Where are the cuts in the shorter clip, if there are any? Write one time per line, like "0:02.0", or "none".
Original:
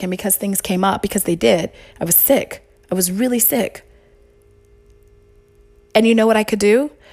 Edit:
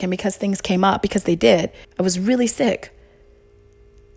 0:01.8